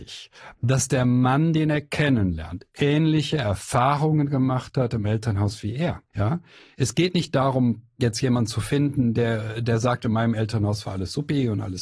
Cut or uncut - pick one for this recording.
cut